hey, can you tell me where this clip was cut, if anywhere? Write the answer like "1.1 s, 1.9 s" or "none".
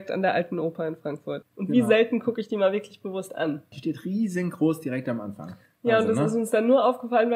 1.4 s, 3.7 s